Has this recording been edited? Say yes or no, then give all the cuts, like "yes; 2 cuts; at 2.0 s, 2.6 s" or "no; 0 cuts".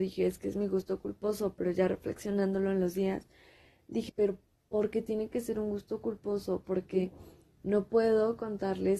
yes; 1 cut; at 4.1 s